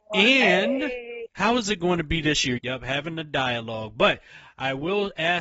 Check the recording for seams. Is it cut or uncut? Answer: cut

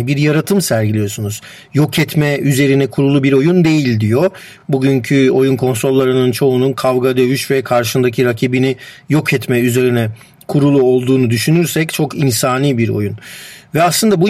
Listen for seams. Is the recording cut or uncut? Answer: uncut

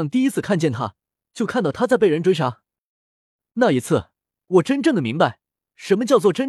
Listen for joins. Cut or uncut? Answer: uncut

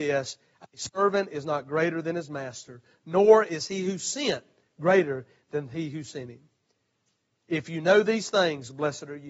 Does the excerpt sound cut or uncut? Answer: uncut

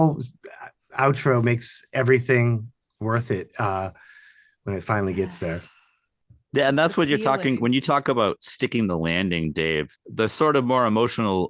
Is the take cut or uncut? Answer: uncut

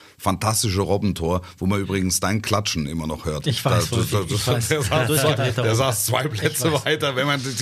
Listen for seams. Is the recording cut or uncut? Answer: uncut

